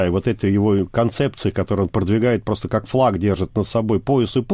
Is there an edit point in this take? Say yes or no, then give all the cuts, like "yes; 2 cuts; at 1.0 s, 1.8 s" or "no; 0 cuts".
no; 0 cuts